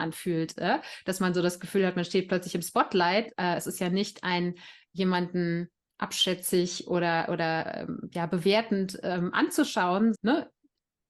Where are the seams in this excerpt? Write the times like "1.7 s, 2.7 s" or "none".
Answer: 3.3 s, 10.1 s